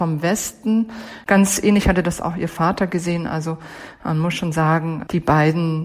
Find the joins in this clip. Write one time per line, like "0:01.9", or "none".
none